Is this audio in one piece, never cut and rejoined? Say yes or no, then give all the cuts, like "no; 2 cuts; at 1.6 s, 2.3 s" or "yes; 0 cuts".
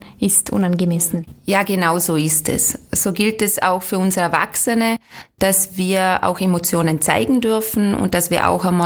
yes; 0 cuts